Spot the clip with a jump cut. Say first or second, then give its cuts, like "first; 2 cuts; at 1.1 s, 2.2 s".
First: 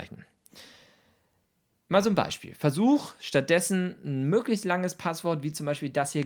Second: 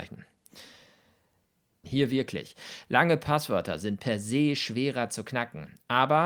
second; 1 cut; at 1.8 s